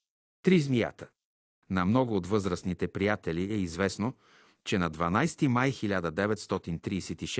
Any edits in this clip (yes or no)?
no